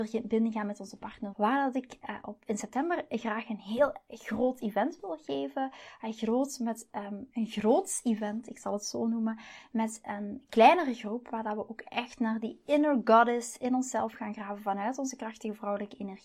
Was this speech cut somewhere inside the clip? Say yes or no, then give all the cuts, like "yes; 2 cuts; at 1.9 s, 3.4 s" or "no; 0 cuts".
yes; 1 cut; at 1.3 s